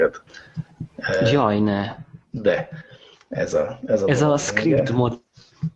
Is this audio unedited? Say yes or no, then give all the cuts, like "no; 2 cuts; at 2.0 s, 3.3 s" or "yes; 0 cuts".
yes; 0 cuts